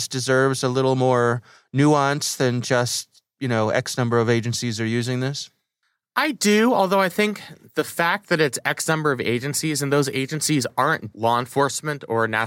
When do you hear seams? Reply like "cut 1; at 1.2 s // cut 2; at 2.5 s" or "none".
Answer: cut 1; at 11.1 s